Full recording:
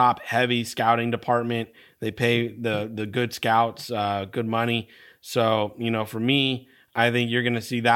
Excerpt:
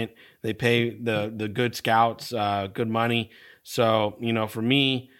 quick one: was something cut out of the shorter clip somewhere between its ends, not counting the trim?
no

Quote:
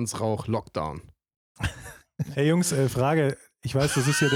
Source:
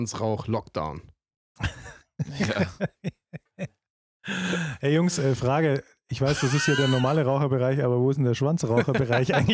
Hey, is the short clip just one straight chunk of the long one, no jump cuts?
no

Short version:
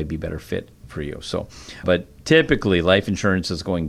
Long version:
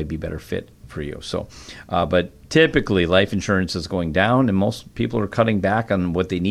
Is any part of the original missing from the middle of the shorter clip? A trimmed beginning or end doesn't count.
yes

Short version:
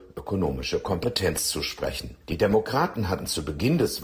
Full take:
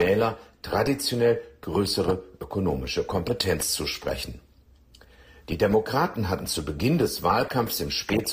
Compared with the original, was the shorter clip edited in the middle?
yes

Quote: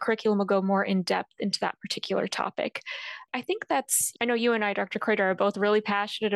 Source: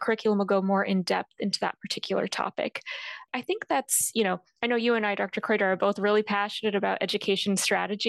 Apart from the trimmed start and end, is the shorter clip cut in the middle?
yes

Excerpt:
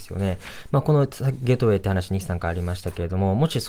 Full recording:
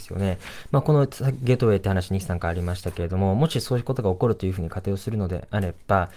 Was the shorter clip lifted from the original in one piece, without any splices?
yes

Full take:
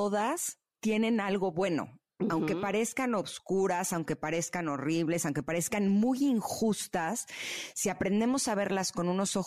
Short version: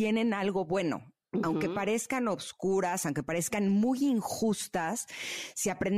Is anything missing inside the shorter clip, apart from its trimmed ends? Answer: yes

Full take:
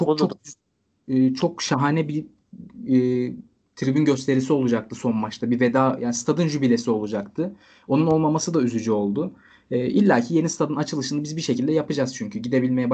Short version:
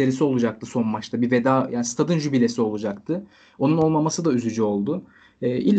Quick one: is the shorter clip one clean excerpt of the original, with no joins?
yes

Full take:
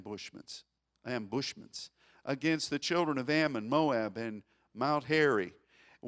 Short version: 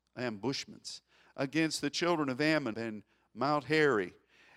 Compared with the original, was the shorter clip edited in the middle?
yes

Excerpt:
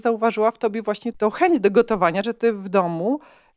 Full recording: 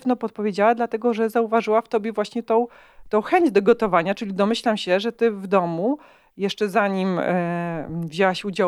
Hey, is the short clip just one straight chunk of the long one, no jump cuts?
no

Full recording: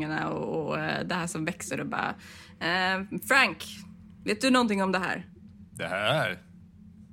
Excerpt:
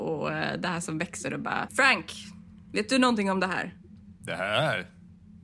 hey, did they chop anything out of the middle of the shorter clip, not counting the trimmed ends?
yes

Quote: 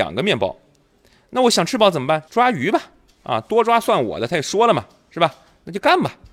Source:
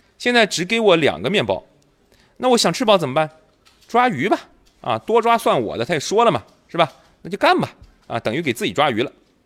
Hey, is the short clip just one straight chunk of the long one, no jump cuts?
no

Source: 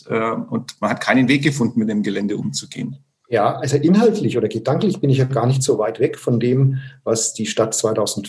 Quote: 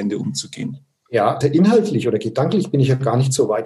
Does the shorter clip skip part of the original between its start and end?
yes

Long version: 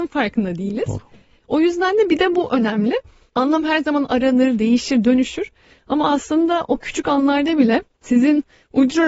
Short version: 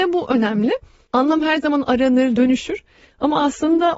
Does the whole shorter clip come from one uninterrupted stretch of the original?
no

